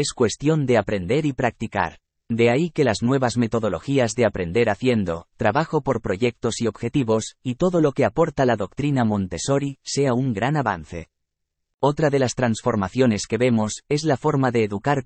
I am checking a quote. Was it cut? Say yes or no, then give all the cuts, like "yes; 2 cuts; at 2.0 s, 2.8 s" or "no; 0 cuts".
no; 0 cuts